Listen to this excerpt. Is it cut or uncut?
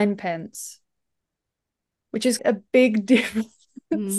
cut